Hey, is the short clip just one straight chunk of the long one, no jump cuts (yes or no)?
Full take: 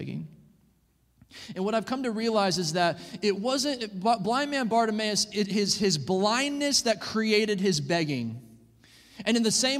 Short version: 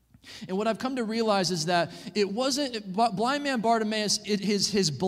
yes